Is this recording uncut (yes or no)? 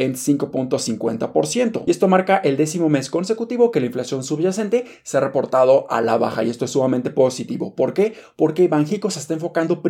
yes